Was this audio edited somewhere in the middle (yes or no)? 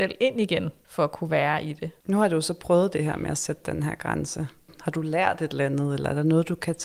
no